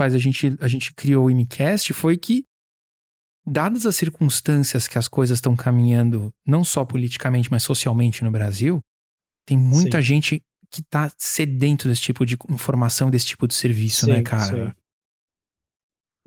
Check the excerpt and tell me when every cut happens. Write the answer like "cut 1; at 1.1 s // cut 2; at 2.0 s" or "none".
none